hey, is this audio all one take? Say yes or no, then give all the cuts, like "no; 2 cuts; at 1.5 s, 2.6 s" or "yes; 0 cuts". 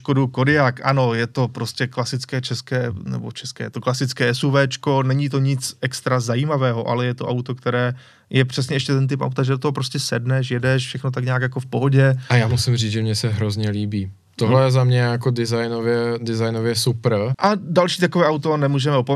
no; 1 cut; at 17.3 s